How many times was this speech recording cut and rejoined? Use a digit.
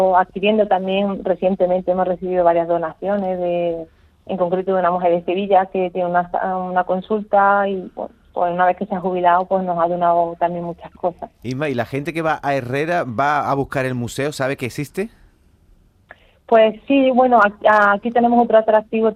0